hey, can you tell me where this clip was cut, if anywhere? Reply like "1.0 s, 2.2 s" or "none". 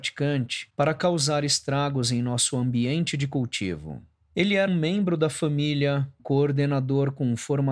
4.7 s, 6.2 s